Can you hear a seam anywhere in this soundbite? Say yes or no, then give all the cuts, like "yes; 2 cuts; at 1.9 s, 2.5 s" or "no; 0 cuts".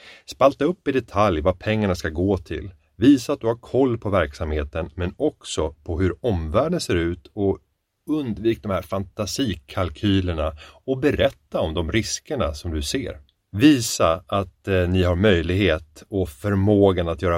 no; 0 cuts